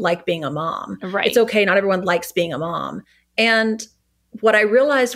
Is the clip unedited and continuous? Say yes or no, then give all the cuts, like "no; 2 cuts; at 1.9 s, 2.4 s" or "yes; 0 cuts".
yes; 0 cuts